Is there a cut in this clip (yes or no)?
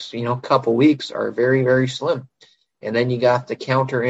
no